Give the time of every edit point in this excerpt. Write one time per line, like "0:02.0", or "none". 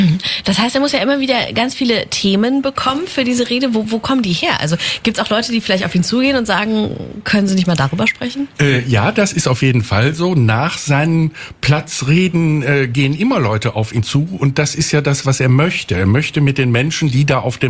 none